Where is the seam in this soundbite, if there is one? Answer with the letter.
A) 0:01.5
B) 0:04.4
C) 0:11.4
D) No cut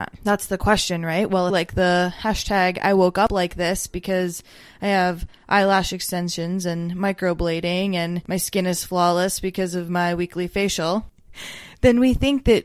A